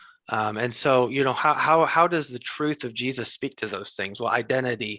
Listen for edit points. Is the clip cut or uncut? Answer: uncut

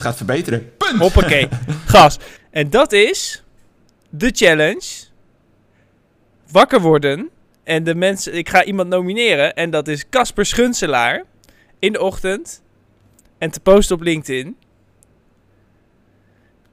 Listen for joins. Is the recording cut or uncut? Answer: cut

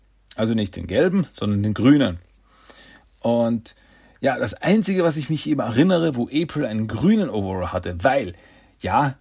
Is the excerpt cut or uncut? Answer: uncut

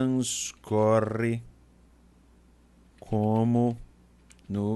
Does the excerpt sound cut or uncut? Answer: uncut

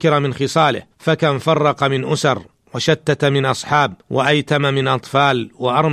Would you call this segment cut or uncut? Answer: cut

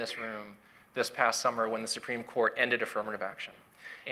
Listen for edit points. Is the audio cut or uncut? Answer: uncut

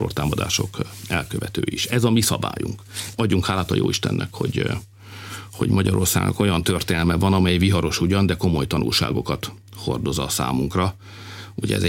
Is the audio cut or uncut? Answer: cut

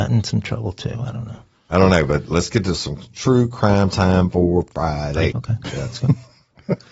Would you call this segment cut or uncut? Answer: cut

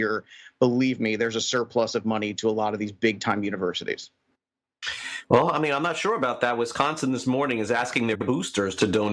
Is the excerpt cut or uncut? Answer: uncut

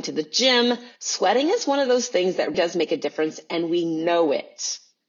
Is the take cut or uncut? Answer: cut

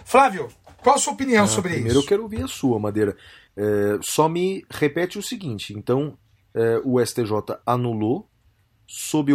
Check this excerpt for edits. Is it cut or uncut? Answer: uncut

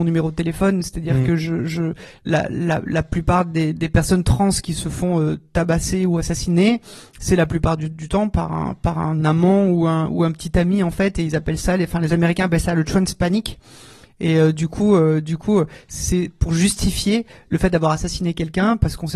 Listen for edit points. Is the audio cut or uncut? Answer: uncut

